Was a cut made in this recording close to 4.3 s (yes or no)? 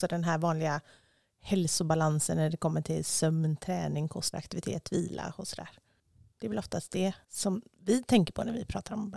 yes